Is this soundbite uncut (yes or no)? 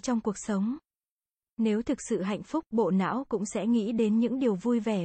yes